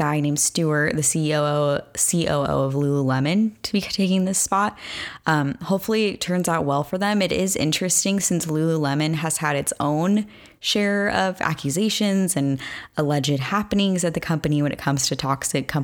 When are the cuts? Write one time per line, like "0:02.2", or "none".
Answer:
none